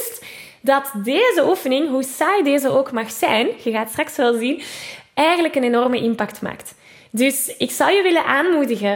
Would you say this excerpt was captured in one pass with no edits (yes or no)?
yes